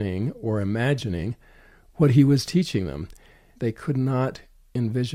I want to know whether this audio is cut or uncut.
cut